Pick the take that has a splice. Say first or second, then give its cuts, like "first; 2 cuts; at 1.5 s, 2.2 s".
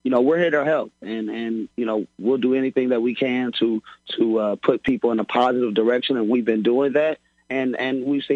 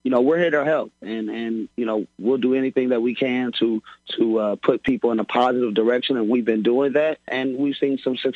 second; 1 cut; at 7.3 s